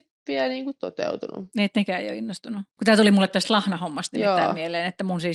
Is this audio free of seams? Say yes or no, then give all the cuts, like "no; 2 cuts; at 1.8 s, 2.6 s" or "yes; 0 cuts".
no; 1 cut; at 2.8 s